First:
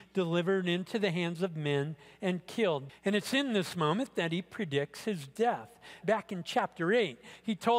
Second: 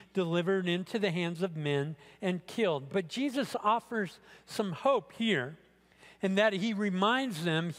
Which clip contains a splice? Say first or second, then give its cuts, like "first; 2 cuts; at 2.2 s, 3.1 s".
first; 2 cuts; at 2.9 s, 6.0 s